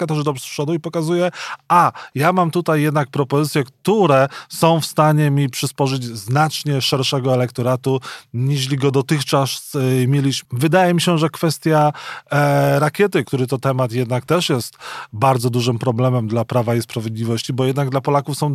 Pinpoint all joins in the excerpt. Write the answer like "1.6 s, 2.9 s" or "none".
10.5 s, 13.2 s